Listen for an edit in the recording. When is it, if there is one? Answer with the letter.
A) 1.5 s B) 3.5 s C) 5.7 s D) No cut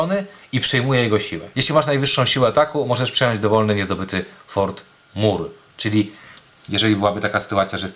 A